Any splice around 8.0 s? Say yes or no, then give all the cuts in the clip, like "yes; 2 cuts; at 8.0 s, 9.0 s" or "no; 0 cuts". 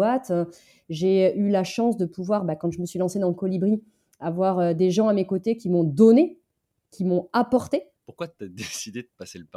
yes; 1 cut; at 8.0 s